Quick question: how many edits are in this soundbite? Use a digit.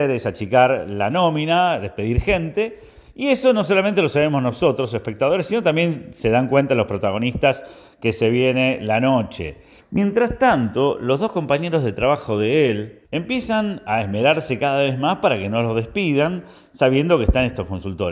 2